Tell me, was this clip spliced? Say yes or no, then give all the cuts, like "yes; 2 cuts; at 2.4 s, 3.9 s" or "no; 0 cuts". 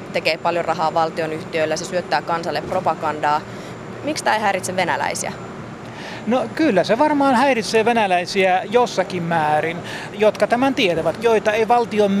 yes; 2 cuts; at 10.1 s, 11.2 s